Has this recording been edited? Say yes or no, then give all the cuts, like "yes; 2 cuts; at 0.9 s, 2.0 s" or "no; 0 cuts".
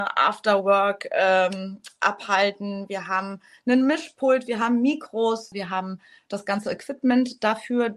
yes; 1 cut; at 5.5 s